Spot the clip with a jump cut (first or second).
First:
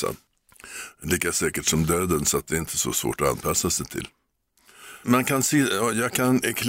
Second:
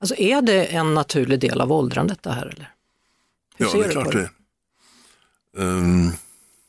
first